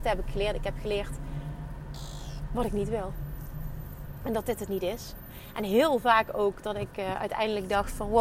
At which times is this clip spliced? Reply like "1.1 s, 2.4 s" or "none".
none